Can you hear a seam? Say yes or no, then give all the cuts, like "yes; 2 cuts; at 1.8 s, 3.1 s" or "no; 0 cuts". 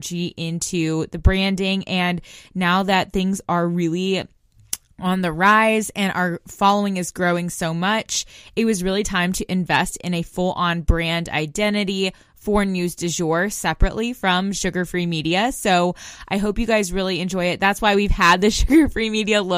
no; 0 cuts